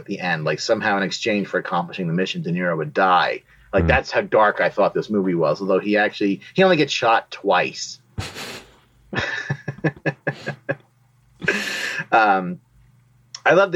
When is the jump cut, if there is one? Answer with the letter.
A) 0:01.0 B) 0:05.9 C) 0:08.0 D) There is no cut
D